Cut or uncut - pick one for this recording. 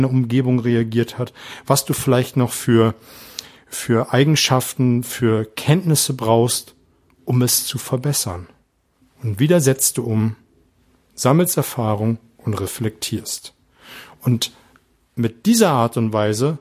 uncut